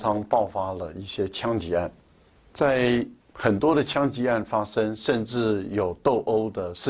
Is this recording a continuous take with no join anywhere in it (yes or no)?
no